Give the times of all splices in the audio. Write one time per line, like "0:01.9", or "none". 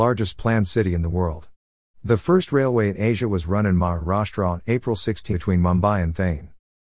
0:05.3